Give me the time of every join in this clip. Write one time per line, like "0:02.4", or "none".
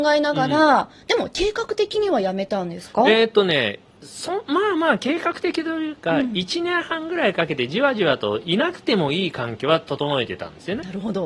none

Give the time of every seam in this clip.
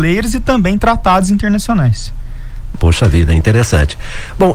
0:02.7

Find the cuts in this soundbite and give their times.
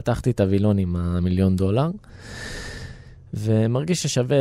none

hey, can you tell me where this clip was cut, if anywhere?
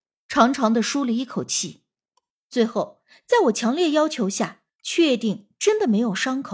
0:02.4
0:04.7

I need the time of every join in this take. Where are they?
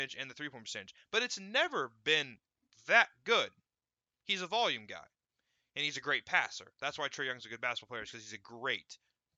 none

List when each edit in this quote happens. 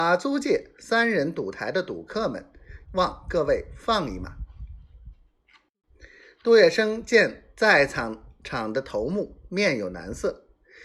0:02.9

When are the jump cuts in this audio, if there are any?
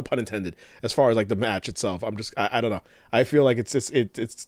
none

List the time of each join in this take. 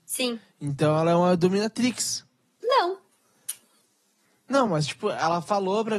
none

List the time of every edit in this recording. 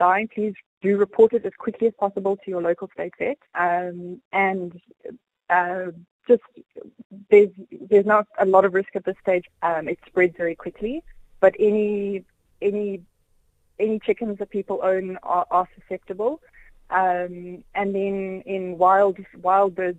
0:03.5
0:09.5

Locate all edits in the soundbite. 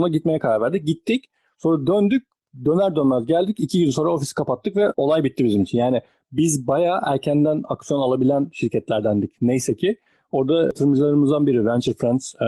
none

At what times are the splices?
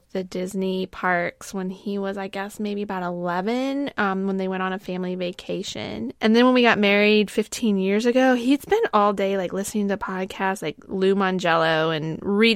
none

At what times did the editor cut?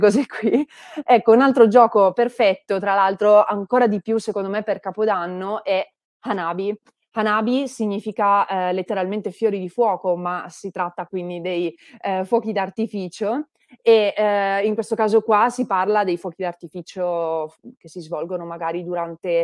none

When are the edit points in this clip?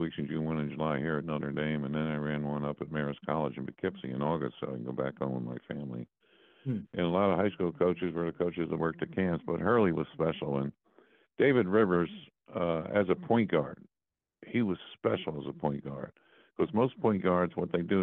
none

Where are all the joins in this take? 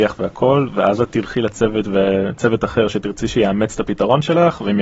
none

